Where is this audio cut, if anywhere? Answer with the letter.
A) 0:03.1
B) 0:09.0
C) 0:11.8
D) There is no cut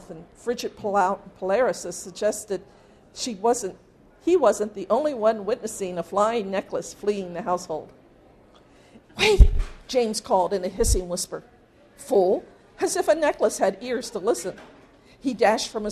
B